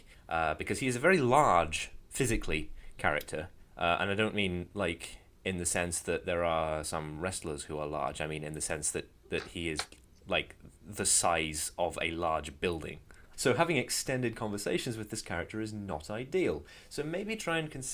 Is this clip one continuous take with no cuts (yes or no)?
no